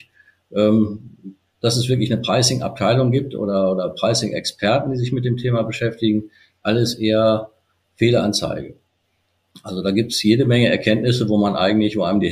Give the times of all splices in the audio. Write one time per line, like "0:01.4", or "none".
none